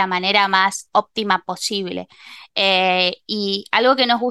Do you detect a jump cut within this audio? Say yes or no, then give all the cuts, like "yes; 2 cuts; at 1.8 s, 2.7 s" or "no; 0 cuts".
no; 0 cuts